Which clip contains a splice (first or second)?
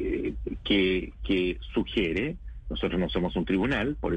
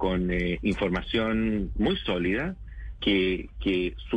second